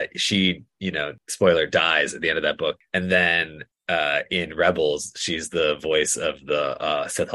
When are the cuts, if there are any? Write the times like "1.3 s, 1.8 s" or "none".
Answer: none